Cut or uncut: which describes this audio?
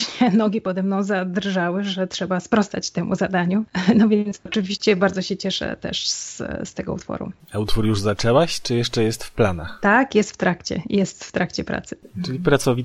uncut